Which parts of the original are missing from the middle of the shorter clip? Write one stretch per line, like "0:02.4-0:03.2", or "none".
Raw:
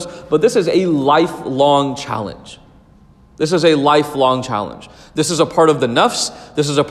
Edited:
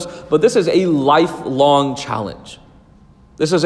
none